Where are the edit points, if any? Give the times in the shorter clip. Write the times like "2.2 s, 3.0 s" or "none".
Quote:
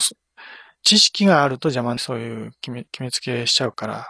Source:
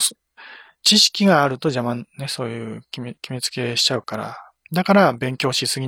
2.0 s